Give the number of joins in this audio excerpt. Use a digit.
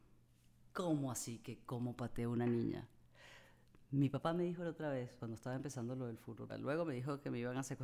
2